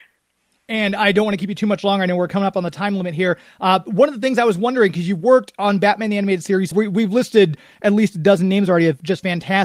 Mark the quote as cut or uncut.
cut